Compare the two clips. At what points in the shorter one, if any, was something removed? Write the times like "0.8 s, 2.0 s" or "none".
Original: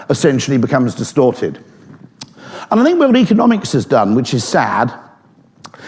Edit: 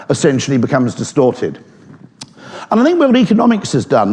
none